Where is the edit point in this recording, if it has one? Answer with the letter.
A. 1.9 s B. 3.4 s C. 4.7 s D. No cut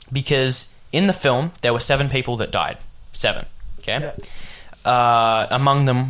C